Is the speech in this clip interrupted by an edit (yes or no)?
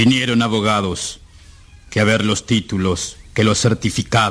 yes